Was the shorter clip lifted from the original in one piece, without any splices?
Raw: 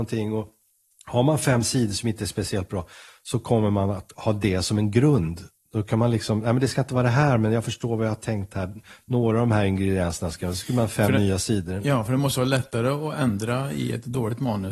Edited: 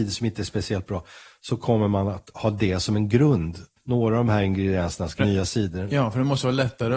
no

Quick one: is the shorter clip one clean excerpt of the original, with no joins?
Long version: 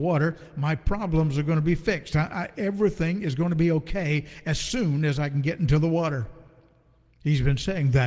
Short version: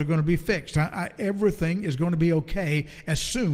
yes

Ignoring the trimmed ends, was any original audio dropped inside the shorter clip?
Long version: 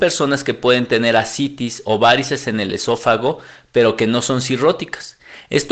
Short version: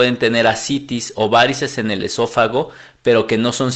no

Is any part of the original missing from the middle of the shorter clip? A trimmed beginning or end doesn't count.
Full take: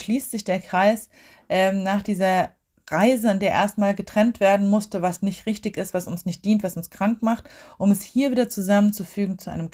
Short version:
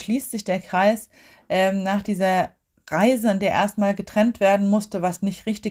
no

